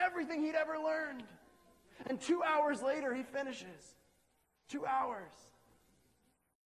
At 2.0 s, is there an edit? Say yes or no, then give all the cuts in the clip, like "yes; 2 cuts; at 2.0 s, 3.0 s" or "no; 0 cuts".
yes; 1 cut; at 2.0 s